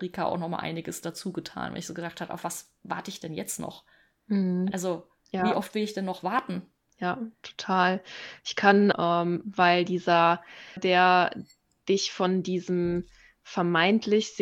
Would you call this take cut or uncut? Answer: cut